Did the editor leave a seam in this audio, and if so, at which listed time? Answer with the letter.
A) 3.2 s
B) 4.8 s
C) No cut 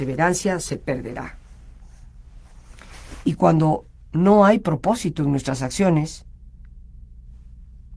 A